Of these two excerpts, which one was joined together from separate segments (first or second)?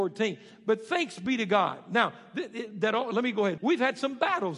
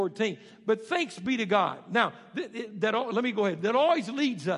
first